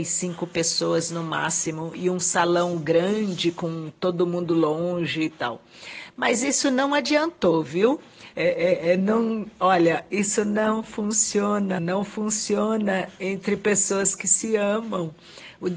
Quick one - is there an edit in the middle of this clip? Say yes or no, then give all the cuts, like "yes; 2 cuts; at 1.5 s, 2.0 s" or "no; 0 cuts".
yes; 2 cuts; at 8.3 s, 11.8 s